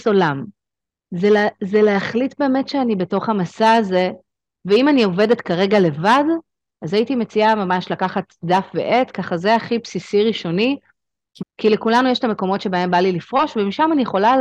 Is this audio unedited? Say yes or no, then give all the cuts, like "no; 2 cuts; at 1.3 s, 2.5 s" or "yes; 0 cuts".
no; 1 cut; at 11.4 s